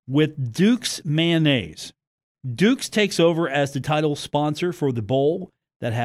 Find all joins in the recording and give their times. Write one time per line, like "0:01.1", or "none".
0:02.4